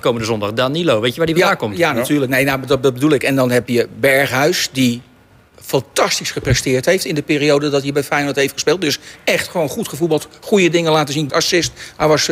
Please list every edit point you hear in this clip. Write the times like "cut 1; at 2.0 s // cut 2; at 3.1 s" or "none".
cut 1; at 11.3 s